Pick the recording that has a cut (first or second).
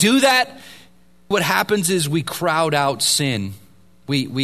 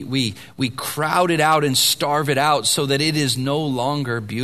first